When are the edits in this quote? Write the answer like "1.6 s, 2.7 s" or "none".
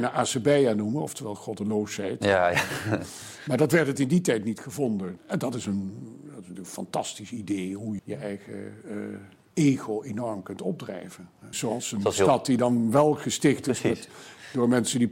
5.2 s, 8.0 s, 11.5 s